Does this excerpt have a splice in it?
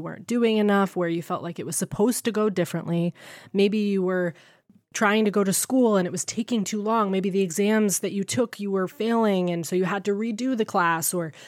no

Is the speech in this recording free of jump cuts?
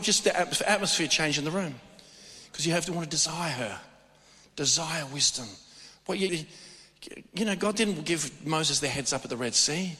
no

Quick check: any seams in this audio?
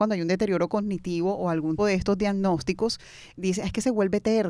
yes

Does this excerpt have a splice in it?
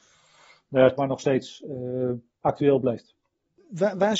yes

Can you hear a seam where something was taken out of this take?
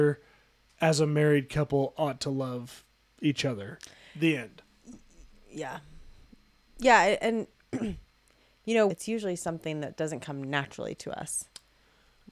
yes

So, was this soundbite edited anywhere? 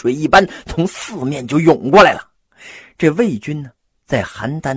no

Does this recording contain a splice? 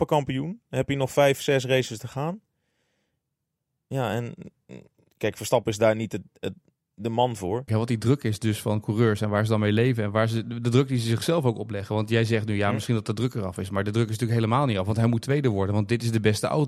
yes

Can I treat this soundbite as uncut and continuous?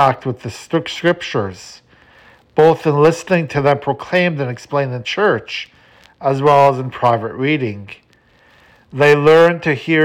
yes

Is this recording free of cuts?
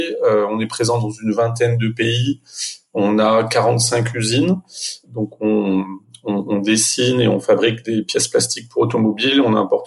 no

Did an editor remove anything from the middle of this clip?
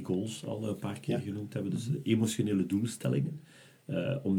no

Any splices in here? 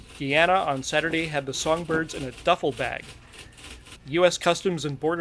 yes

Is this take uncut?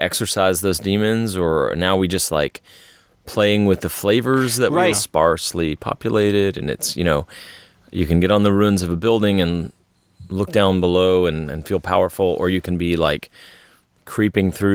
no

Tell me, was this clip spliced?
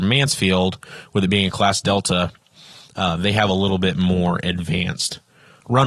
no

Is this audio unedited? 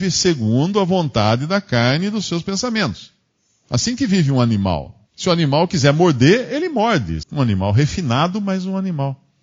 no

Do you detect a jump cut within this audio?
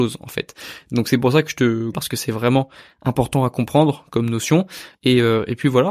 yes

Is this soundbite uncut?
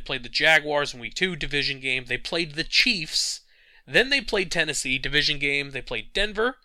yes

